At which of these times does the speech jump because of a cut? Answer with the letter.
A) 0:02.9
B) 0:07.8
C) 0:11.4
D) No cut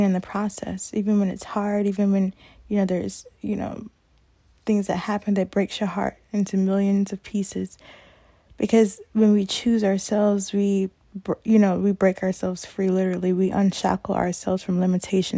D